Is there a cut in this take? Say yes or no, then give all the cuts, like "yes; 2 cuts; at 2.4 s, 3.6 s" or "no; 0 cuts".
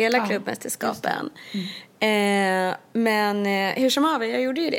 no; 0 cuts